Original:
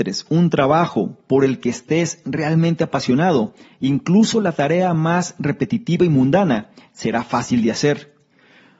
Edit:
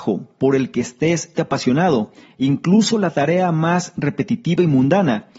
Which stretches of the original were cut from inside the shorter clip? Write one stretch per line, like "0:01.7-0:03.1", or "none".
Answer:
0:02.2-0:02.8